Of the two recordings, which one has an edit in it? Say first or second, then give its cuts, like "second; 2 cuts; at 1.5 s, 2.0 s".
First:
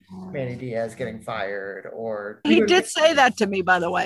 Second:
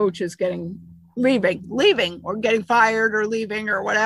first; 1 cut; at 2.4 s